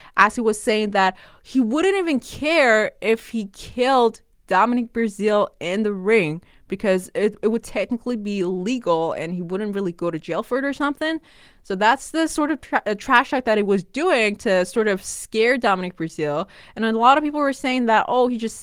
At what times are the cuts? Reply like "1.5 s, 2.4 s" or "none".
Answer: none